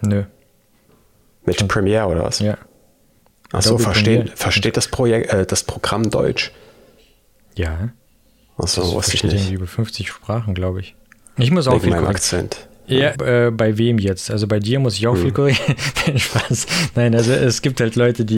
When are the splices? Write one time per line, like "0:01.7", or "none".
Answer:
0:11.4
0:13.1